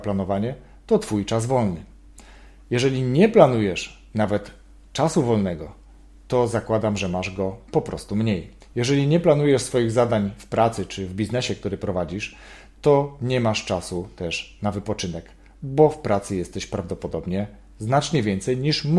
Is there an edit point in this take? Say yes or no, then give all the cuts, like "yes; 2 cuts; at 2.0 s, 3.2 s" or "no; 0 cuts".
no; 0 cuts